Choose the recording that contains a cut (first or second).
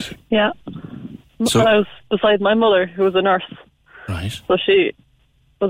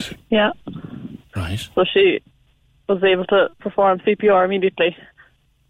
second